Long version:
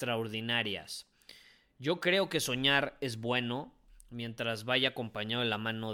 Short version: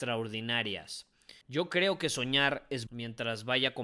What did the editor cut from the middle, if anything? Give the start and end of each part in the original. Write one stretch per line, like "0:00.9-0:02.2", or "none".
0:01.4-0:01.7
0:03.2-0:04.1